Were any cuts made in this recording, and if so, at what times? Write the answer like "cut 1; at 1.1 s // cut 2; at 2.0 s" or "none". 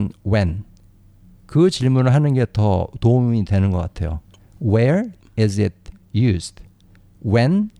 none